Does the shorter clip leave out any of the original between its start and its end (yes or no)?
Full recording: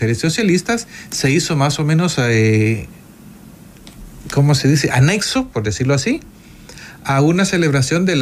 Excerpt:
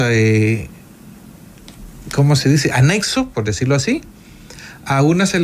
no